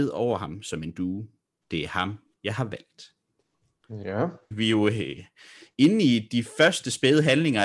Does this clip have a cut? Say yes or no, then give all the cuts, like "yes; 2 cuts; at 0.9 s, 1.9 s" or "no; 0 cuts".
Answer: yes; 2 cuts; at 1.6 s, 4.5 s